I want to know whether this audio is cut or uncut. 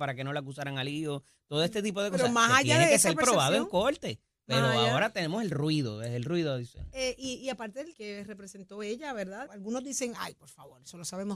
cut